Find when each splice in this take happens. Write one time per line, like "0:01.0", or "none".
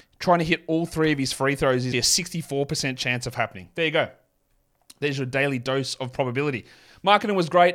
0:01.9

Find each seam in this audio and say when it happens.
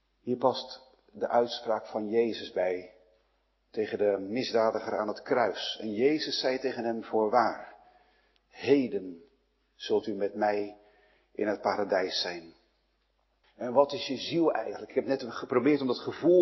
0:08.4
0:13.4

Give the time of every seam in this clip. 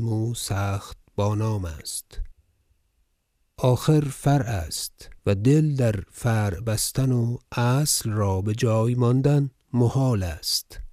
0:05.2

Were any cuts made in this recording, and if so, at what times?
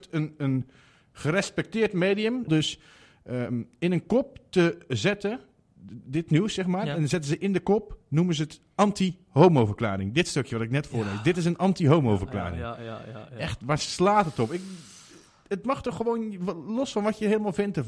0:02.5

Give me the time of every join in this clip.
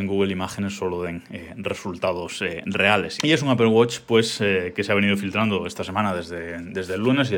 0:03.2

